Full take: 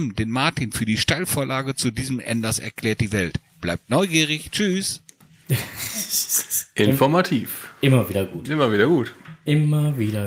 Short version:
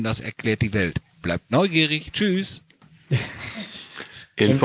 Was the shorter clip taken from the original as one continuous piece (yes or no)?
yes